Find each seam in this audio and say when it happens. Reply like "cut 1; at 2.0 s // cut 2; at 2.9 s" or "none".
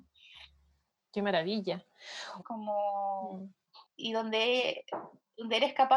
cut 1; at 2.4 s